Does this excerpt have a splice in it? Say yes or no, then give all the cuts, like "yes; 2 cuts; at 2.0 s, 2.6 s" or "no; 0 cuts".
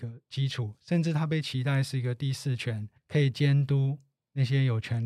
yes; 1 cut; at 3.0 s